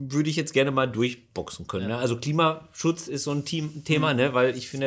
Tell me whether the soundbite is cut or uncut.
uncut